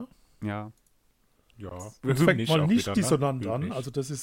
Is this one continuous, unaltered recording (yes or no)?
yes